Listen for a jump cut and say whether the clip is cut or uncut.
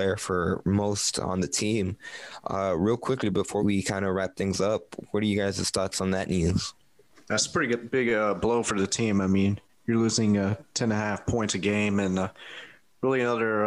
cut